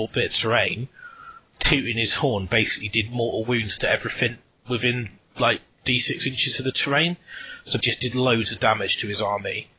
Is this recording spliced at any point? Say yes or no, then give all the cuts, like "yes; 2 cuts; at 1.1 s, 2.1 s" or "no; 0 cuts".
yes; 1 cut; at 7.8 s